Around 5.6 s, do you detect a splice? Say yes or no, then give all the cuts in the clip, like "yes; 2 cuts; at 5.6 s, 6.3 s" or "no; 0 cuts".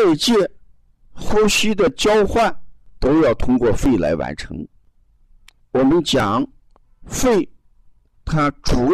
yes; 1 cut; at 5.6 s